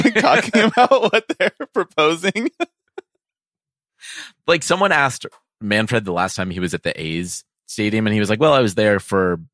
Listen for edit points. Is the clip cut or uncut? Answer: uncut